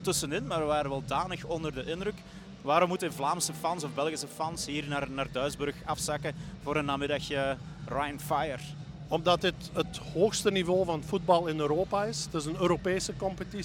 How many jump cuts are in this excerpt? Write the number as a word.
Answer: zero